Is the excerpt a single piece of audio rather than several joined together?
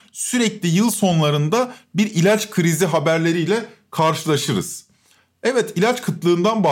yes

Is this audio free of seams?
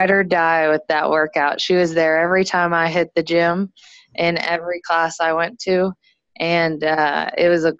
yes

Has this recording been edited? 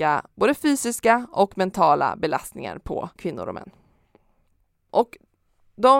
no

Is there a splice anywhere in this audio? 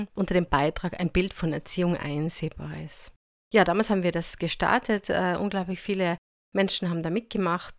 no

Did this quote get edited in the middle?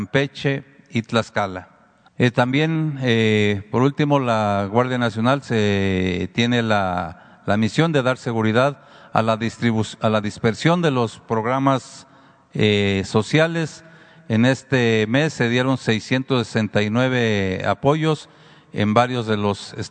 yes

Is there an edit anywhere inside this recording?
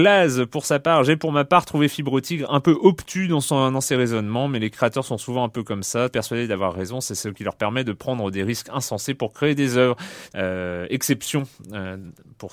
yes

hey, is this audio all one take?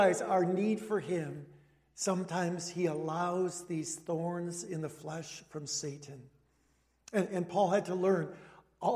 yes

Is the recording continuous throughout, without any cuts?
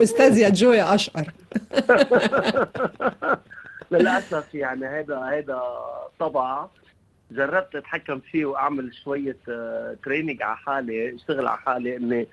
yes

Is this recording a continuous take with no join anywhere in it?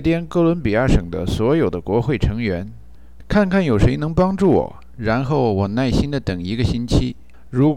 yes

